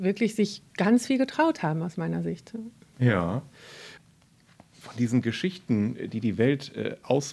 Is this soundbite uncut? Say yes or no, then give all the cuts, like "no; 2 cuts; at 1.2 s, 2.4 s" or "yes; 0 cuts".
yes; 0 cuts